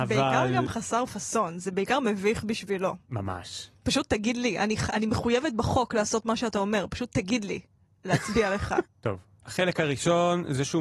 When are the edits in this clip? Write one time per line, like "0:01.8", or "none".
0:03.0
0:08.8